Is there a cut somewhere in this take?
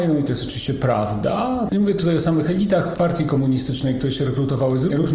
yes; 1 cut; at 1.7 s

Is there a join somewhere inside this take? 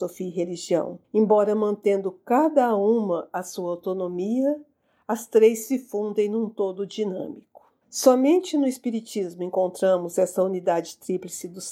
yes; 2 cuts; at 1.0 s, 7.8 s

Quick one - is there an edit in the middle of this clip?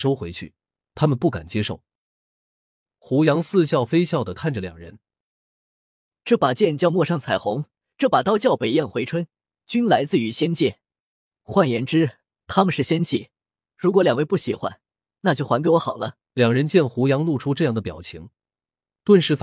yes; 1 cut; at 16.2 s

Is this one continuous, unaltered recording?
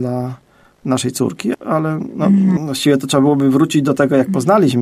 no; 2 cuts; at 1.5 s, 2.6 s

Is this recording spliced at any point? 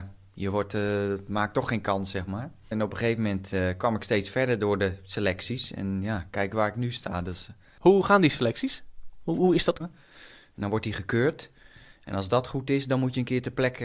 yes; 2 cuts; at 2.7 s, 9.8 s

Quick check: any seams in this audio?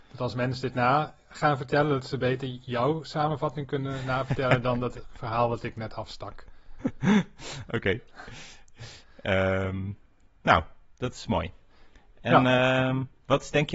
no; 0 cuts

